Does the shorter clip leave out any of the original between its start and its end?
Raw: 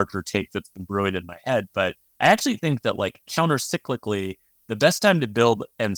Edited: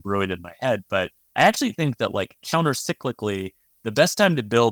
no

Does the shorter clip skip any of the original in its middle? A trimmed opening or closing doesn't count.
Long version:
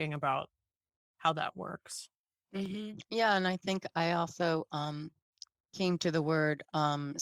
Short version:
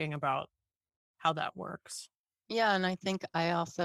yes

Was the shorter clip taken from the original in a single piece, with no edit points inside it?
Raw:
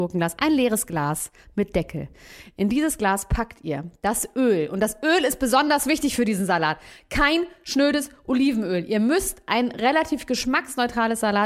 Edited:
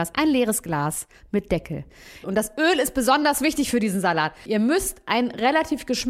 no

